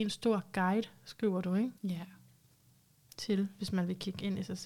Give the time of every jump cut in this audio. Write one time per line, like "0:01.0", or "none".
0:01.8